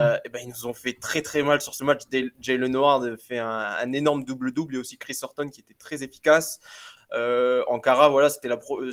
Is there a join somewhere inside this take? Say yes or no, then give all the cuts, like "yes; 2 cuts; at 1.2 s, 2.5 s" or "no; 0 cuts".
yes; 1 cut; at 7.0 s